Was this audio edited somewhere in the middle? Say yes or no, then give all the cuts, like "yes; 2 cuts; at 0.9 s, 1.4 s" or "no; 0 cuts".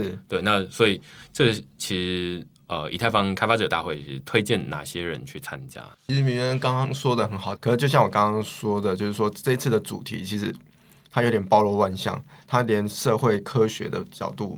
yes; 2 cuts; at 5.9 s, 7.6 s